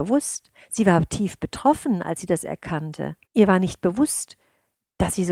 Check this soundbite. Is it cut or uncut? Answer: cut